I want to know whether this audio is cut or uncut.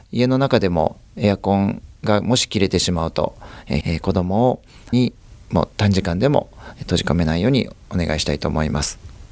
cut